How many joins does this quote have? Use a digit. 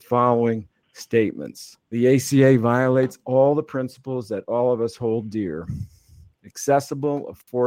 1